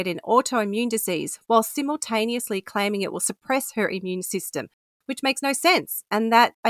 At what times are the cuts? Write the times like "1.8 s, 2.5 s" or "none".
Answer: none